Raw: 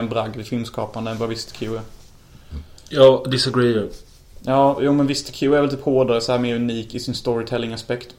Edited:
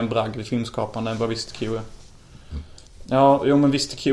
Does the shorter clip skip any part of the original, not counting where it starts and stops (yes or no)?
yes